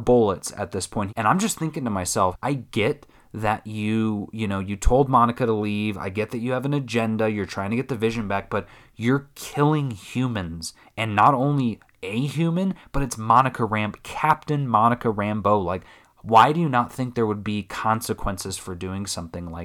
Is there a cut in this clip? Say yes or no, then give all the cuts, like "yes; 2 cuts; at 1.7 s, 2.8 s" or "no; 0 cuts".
yes; 2 cuts; at 1.1 s, 2.3 s